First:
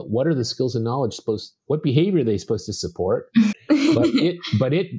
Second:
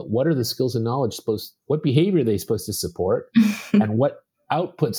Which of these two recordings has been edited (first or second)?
first